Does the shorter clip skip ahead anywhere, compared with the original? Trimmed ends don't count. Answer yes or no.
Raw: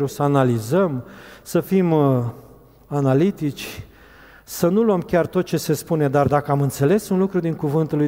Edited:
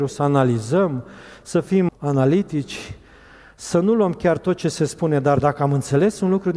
yes